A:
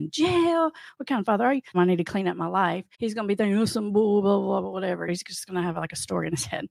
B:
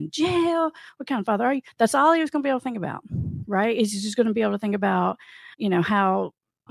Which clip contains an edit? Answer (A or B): A